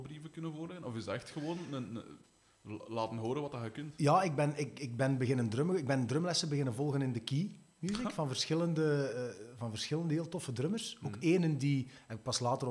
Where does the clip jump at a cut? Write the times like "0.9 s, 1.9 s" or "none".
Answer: none